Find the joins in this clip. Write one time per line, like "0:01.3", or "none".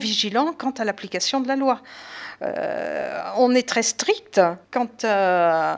0:04.6

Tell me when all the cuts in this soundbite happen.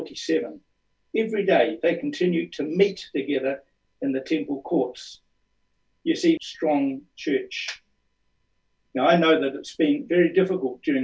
0:06.4

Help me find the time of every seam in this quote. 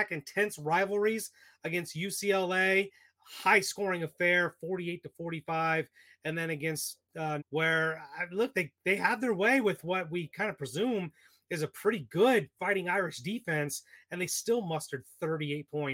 0:07.4

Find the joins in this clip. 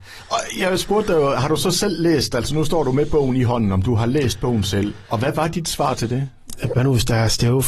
0:05.1
0:06.7

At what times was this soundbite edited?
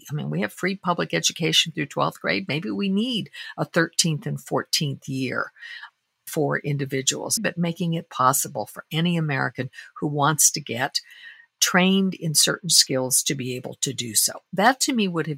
0:07.4

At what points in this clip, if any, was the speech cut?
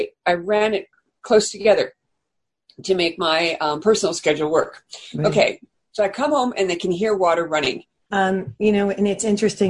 0:08.1

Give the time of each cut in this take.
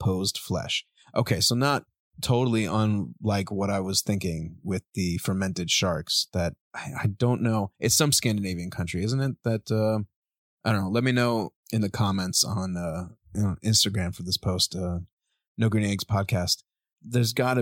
0:06.6

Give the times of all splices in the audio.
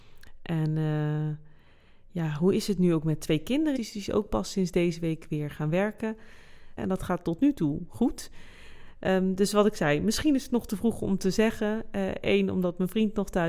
0:03.8
0:06.8

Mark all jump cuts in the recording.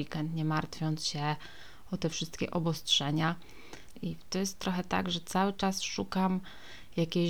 0:04.0

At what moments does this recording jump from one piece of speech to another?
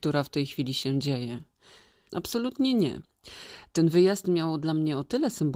0:02.1

